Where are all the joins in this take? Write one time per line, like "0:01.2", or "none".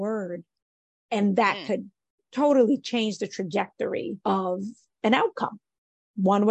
0:04.2